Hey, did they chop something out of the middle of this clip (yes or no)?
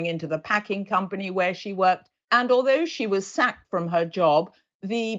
yes